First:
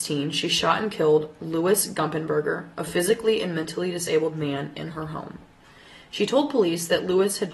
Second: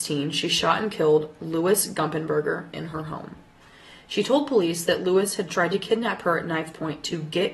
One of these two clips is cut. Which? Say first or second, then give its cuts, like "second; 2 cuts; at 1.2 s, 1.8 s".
second; 1 cut; at 2.7 s